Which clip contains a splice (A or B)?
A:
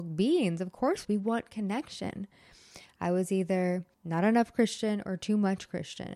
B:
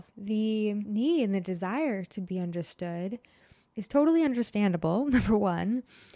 A